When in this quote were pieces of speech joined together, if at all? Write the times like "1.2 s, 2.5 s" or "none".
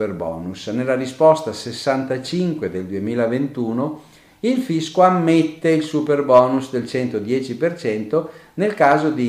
none